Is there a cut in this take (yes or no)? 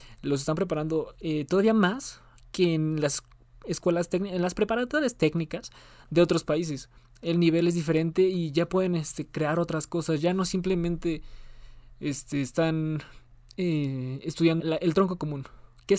yes